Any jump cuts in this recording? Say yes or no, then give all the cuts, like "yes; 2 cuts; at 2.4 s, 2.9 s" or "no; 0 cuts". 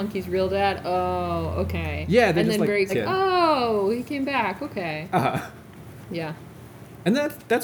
yes; 1 cut; at 2.9 s